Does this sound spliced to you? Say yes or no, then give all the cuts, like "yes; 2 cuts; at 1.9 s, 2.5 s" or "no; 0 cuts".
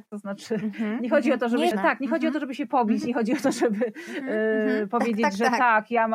yes; 1 cut; at 1.7 s